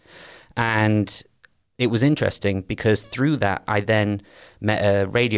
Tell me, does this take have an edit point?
no; 0 cuts

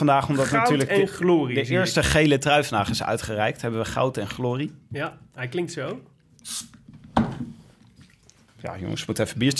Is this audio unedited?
yes; 0 cuts

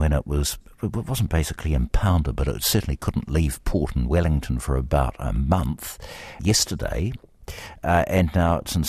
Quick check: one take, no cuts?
no; 1 cut; at 6.4 s

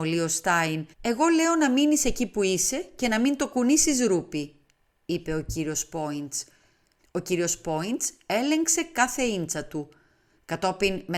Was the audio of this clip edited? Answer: yes; 2 cuts; at 0.9 s, 7.0 s

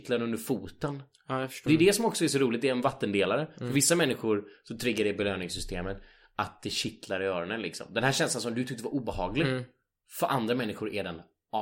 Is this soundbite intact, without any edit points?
no; 1 cut; at 1.7 s

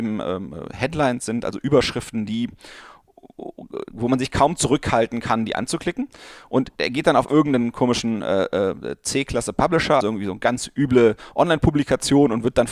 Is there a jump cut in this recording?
yes; 1 cut; at 10.0 s

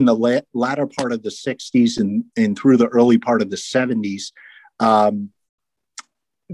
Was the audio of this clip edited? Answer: no; 0 cuts

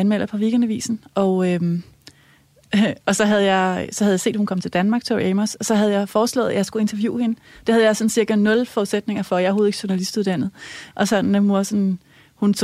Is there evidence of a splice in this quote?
yes; 1 cut; at 10.9 s

